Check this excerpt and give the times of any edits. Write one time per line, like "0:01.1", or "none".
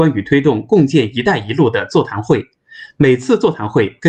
none